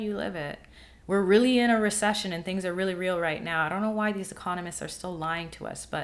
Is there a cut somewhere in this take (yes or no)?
no